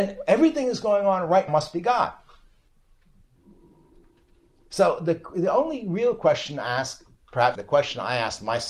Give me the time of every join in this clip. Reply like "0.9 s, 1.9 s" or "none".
1.5 s, 7.6 s